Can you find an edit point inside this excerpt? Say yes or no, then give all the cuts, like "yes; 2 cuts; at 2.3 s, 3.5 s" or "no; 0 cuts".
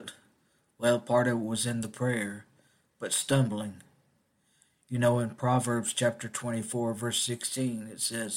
no; 0 cuts